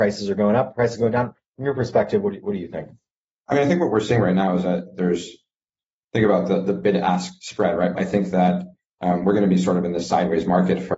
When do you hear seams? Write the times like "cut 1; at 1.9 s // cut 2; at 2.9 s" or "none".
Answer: cut 1; at 7.9 s